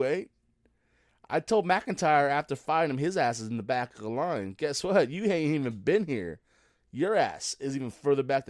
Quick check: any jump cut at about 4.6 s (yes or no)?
no